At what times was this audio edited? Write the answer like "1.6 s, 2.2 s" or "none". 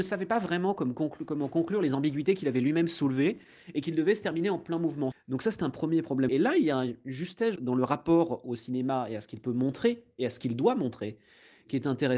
5.1 s, 6.3 s, 7.6 s

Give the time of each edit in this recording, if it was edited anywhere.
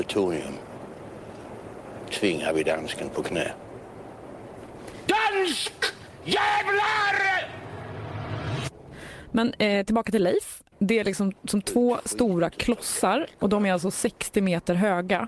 5.1 s, 10.7 s

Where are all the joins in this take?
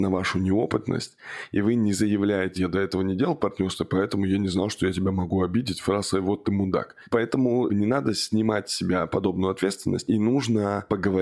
2.6 s

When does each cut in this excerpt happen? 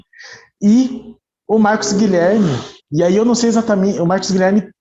2.8 s

